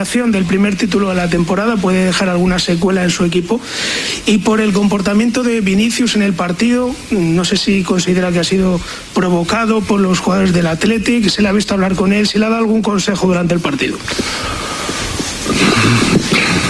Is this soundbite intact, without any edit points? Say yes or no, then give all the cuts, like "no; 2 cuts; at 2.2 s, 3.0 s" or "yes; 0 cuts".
yes; 0 cuts